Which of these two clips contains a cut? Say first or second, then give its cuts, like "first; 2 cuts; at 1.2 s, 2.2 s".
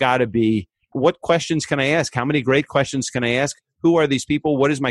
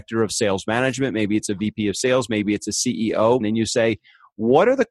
second; 1 cut; at 3.4 s